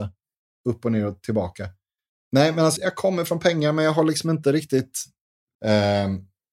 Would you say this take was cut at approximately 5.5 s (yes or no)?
yes